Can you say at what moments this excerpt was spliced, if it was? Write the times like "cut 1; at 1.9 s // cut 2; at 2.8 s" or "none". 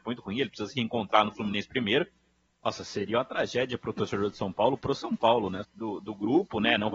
cut 1; at 2.5 s // cut 2; at 5.6 s